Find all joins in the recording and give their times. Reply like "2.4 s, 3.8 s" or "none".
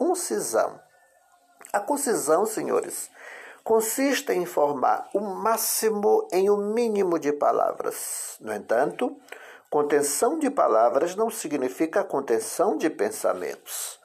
none